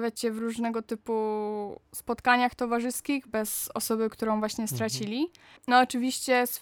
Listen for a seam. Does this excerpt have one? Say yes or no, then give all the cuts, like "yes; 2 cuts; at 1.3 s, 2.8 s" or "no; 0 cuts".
yes; 1 cut; at 5.6 s